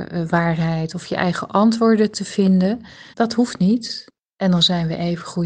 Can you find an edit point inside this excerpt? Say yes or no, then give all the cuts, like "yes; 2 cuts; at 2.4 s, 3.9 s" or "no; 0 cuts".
yes; 1 cut; at 3.1 s